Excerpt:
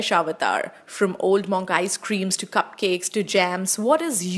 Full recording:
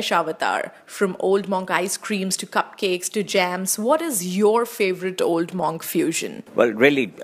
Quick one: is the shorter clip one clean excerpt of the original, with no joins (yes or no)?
yes